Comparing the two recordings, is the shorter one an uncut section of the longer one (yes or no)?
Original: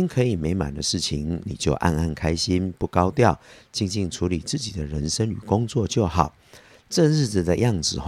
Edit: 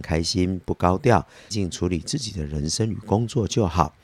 no